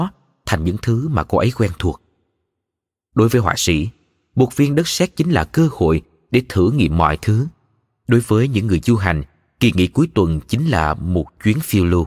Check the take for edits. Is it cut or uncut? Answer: uncut